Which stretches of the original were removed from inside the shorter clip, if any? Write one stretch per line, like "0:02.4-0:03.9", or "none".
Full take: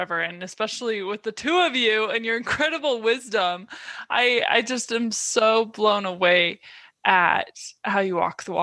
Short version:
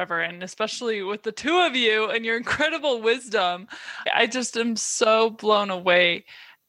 0:04.1-0:04.4